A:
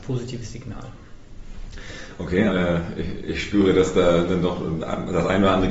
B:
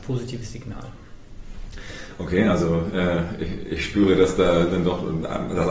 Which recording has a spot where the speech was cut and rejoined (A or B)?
A